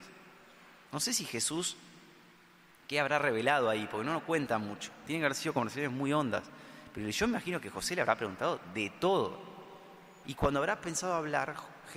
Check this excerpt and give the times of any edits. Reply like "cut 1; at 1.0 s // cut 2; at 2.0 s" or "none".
cut 1; at 10.2 s